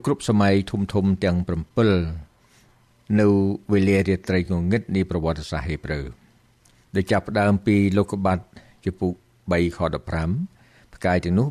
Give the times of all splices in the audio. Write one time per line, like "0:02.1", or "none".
none

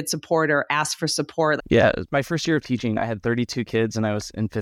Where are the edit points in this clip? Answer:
0:01.6

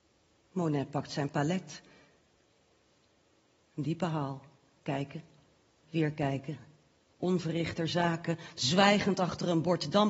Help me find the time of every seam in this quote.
0:03.6
0:05.8
0:08.6

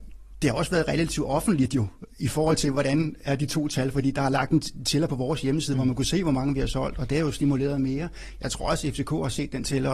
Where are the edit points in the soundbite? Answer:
none

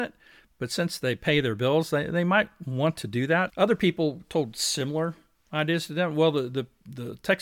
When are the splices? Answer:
0:03.5

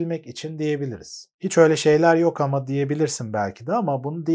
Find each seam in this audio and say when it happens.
0:01.3

